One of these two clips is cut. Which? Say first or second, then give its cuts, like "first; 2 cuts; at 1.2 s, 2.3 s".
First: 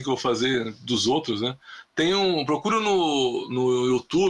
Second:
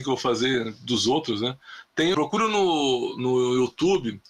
second; 1 cut; at 2.1 s